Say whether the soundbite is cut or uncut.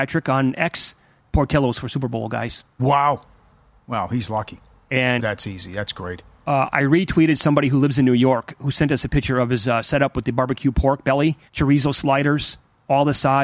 cut